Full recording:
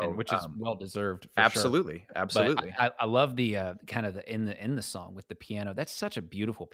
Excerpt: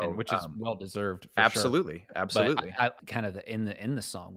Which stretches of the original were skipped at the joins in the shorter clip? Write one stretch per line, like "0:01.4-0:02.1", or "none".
0:03.0-0:03.8